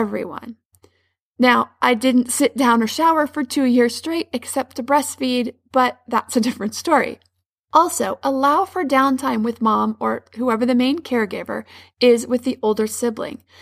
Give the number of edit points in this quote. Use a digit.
0